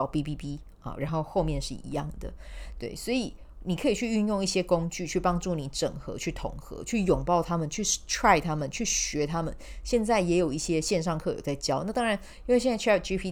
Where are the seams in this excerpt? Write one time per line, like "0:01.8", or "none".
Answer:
none